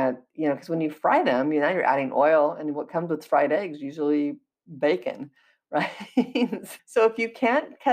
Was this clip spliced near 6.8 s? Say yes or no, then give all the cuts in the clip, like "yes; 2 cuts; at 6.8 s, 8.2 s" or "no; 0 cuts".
yes; 1 cut; at 6.8 s